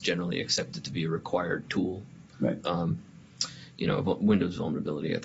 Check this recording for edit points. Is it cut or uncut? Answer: cut